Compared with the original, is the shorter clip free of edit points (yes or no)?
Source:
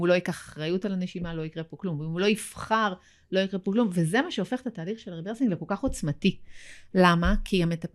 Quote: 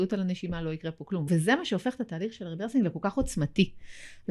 no